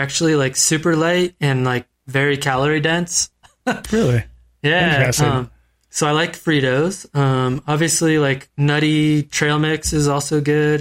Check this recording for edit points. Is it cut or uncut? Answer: uncut